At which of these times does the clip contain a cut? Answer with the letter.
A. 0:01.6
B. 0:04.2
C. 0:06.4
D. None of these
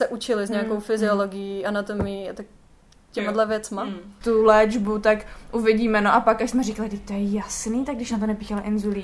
B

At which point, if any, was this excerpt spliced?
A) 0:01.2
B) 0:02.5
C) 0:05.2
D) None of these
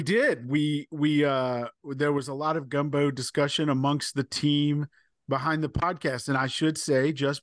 D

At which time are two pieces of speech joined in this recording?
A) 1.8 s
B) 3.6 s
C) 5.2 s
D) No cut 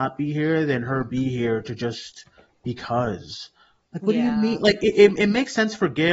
D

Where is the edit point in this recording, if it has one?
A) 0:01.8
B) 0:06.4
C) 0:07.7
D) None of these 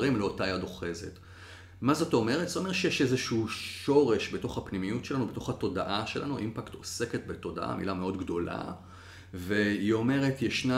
D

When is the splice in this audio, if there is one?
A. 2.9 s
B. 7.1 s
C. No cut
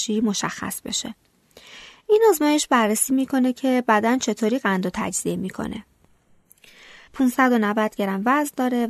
B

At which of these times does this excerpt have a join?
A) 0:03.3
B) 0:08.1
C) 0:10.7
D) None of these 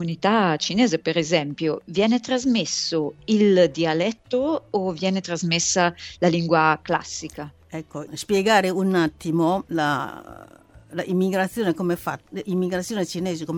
B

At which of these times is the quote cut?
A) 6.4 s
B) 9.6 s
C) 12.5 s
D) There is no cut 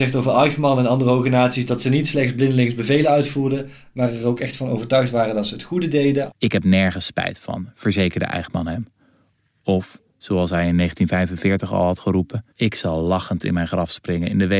C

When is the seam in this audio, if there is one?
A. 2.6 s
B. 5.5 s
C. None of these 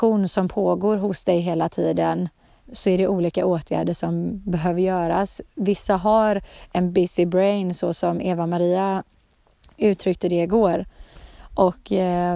A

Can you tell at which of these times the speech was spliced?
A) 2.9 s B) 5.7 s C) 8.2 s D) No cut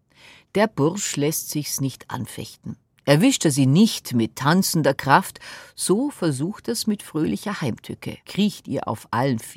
C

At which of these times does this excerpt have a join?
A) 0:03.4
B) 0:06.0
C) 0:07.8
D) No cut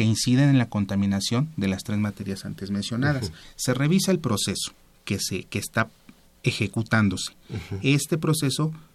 A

